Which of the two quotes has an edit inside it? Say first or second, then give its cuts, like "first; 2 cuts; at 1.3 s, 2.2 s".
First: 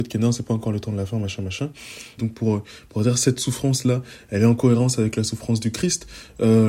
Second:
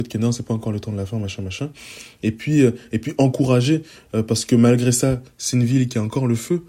first; 1 cut; at 2.2 s